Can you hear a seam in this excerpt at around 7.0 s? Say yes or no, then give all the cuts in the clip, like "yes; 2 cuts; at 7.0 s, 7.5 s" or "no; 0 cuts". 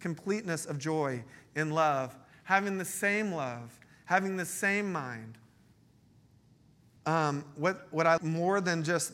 yes; 2 cuts; at 7.0 s, 8.2 s